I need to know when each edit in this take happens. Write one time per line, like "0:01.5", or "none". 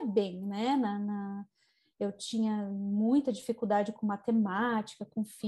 none